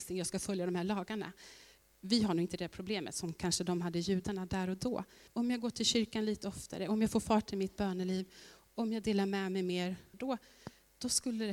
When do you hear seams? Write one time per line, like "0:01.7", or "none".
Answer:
0:05.3
0:10.1